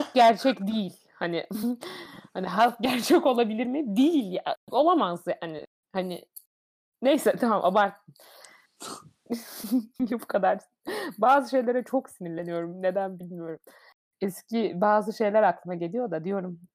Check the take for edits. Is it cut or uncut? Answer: uncut